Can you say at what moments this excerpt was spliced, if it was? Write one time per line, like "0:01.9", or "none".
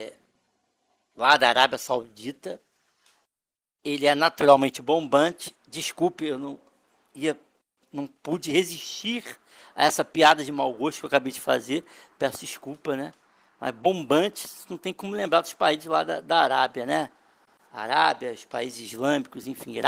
none